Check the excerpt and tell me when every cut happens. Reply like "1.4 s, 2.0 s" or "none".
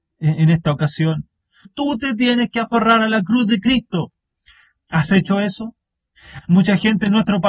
1.6 s, 6.4 s